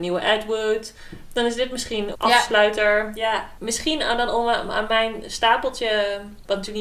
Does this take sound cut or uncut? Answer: cut